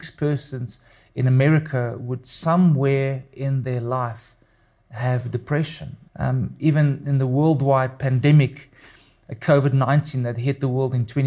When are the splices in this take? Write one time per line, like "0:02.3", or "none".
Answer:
0:06.1